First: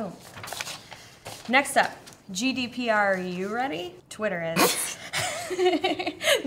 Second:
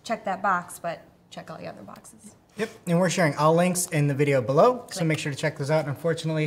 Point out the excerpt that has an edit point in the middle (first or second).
first